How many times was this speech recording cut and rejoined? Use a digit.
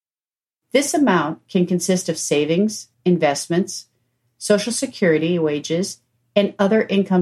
1